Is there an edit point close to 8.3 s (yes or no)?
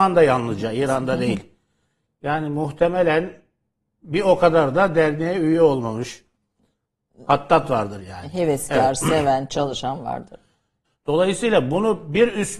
no